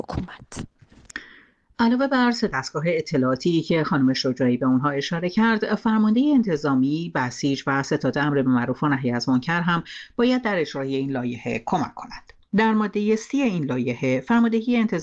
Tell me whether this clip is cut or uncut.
uncut